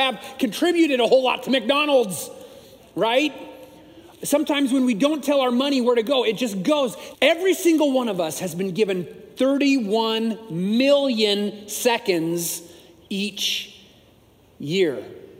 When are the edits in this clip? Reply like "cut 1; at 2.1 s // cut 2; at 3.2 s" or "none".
cut 1; at 7.1 s